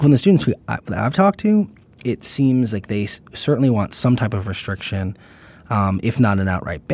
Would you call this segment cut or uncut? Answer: uncut